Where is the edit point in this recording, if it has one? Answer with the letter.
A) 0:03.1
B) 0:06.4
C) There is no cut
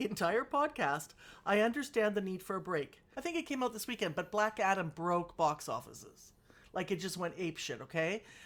A